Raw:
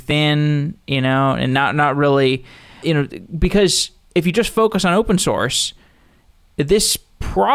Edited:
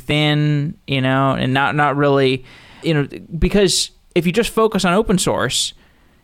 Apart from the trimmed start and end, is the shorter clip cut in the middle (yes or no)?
no